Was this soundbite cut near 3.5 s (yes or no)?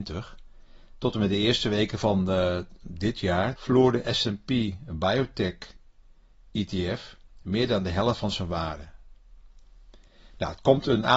yes